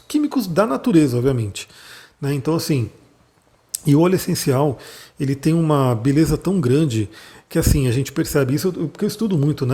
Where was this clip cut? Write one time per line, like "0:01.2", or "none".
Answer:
none